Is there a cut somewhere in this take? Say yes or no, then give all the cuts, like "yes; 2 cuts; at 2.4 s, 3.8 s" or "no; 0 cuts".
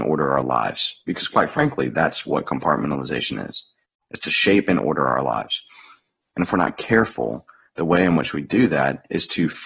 no; 0 cuts